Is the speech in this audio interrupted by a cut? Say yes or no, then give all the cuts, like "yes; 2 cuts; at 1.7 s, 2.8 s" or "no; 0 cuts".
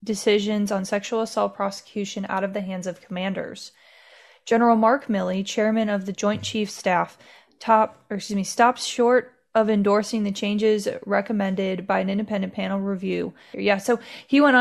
yes; 1 cut; at 13.5 s